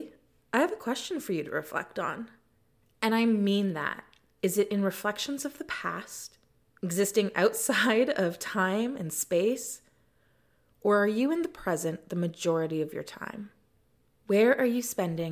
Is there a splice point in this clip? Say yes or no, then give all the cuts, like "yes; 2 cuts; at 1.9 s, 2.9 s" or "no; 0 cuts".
yes; 2 cuts; at 4.4 s, 6.8 s